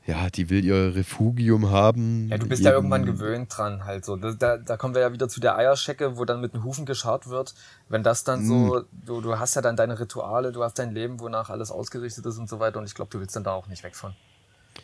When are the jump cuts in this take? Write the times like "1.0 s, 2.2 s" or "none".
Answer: none